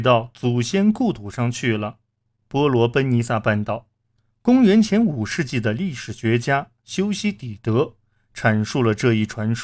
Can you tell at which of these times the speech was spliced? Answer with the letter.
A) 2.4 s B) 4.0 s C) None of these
A